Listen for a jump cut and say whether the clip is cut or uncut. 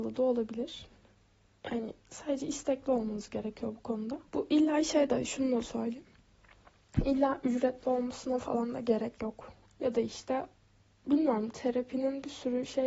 cut